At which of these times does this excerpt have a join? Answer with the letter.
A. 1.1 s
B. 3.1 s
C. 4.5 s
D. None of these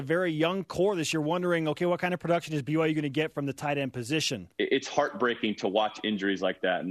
C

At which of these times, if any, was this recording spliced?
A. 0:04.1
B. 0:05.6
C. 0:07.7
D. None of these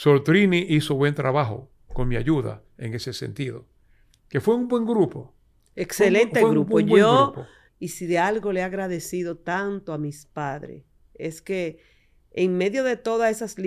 C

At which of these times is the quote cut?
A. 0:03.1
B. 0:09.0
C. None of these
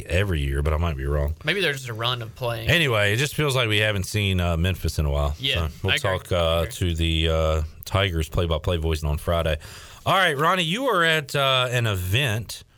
B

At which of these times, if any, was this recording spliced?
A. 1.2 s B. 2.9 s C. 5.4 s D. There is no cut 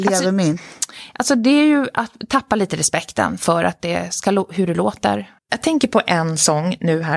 C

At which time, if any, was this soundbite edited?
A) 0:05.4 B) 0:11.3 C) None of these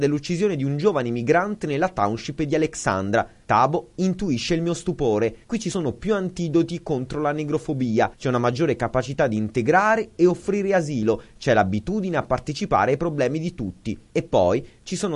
A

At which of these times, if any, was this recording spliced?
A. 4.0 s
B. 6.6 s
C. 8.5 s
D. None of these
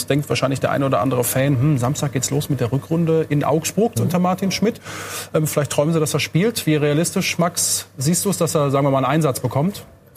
A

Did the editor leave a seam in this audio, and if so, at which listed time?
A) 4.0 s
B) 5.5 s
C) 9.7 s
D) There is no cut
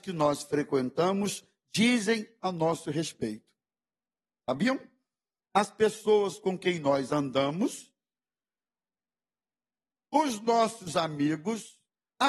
D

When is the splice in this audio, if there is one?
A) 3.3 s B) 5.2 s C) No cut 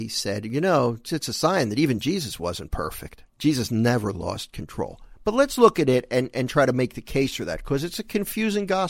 A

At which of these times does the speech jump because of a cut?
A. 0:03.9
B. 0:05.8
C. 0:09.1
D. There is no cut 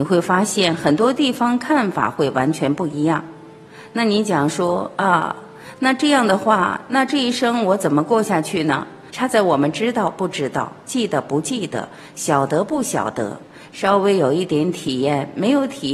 C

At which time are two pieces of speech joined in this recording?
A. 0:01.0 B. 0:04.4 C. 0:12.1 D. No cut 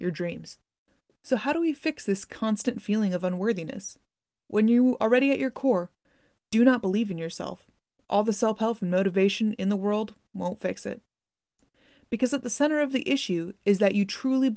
B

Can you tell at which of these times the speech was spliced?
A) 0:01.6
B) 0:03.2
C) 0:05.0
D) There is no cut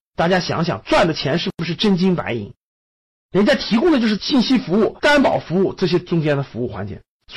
C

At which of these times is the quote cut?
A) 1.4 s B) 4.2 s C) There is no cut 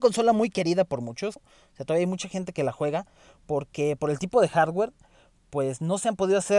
A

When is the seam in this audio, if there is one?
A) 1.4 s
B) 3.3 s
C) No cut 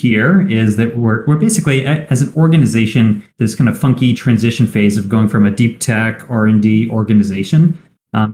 B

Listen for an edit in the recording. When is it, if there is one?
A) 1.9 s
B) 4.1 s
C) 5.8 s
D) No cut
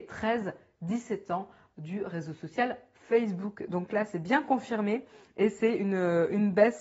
D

